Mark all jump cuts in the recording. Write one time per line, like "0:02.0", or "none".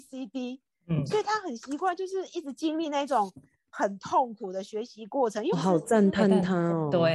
0:05.5